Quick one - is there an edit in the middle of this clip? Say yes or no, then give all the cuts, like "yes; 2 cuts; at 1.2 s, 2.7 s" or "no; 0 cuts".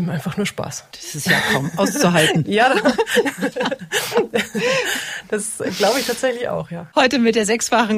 yes; 1 cut; at 0.9 s